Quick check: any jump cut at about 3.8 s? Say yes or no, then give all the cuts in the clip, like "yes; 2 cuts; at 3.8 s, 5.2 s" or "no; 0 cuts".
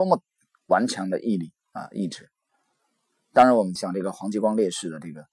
yes; 1 cut; at 3.8 s